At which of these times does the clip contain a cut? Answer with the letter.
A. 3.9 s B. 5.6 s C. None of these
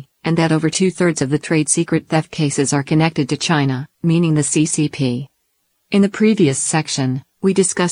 A